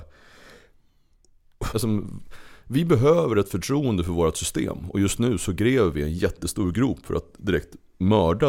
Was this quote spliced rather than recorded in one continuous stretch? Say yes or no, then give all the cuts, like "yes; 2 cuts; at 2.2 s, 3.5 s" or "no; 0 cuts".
yes; 1 cut; at 1.7 s